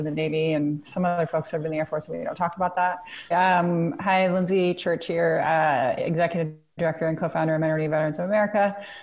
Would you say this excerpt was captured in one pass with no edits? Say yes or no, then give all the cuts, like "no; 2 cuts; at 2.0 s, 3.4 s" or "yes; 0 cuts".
no; 1 cut; at 3.3 s